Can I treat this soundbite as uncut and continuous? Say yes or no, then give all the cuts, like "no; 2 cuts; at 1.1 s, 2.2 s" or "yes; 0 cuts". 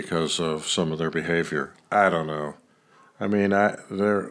no; 1 cut; at 1.7 s